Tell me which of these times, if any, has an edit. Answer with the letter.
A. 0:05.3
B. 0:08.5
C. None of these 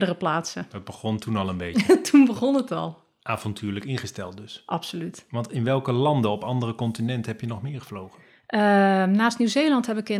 C